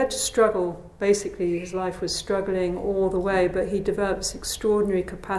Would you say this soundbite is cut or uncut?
uncut